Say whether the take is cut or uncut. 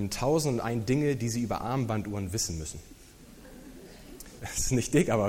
cut